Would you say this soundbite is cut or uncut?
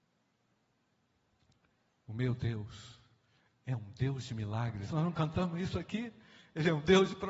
cut